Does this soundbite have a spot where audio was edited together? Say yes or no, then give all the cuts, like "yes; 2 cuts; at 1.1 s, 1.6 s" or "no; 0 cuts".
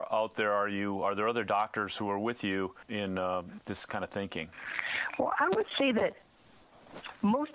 no; 0 cuts